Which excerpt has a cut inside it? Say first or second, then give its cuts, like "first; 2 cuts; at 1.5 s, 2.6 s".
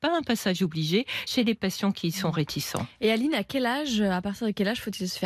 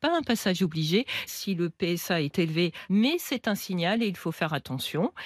second; 2 cuts; at 1.3 s, 2.9 s